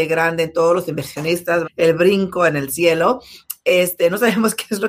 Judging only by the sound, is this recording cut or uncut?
cut